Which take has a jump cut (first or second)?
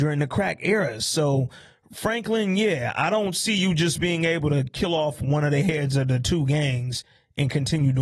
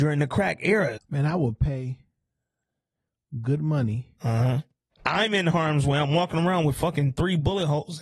second